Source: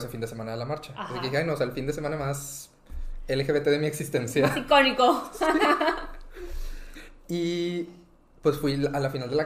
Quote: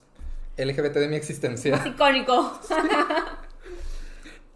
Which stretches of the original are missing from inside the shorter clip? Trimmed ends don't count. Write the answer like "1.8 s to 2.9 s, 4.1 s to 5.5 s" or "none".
none